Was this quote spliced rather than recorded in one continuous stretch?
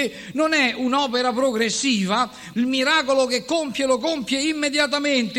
yes; 1 cut; at 2.5 s

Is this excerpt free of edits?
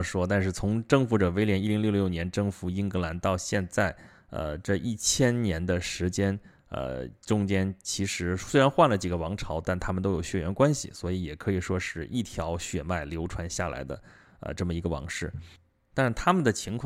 yes; 0 cuts

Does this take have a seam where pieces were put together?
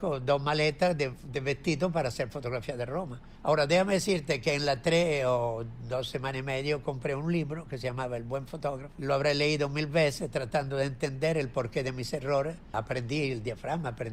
no; 0 cuts

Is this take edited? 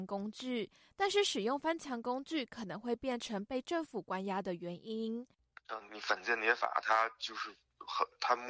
yes; 1 cut; at 5.9 s

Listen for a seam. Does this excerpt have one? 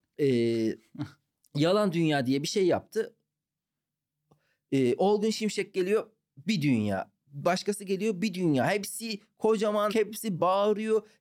yes; 1 cut; at 9.9 s

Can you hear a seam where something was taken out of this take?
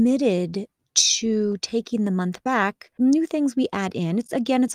yes; 1 cut; at 3.0 s

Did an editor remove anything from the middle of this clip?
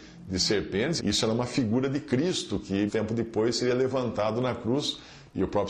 yes; 2 cuts; at 1.0 s, 2.9 s

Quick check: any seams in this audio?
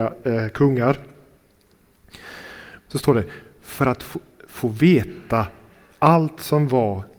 yes; 1 cut; at 2.9 s

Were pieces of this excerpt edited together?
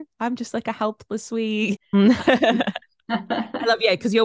yes; 1 cut; at 1.8 s

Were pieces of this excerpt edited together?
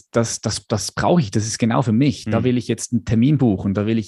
no; 0 cuts

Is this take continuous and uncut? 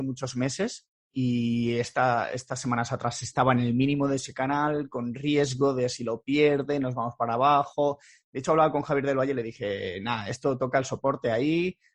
yes; 0 cuts

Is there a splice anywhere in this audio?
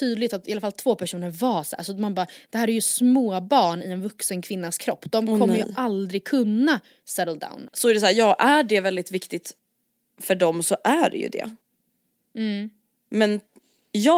yes; 1 cut; at 7.7 s

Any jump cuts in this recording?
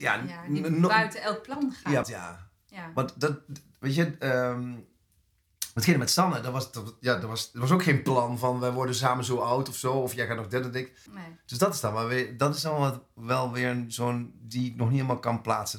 yes; 2 cuts; at 2.0 s, 11.1 s

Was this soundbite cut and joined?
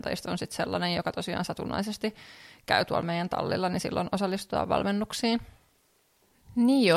no; 0 cuts

